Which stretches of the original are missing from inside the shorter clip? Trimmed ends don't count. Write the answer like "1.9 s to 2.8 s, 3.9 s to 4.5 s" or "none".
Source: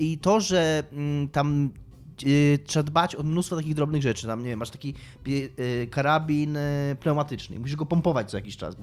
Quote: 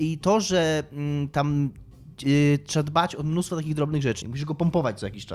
4.2 s to 7.5 s